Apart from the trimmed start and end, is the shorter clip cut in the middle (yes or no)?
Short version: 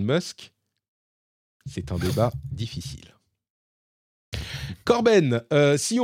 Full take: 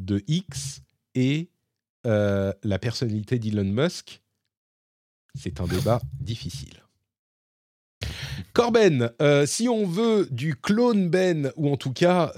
no